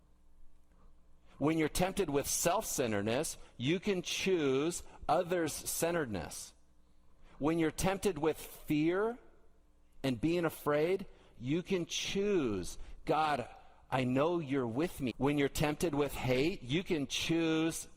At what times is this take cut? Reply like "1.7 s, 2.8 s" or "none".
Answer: 15.1 s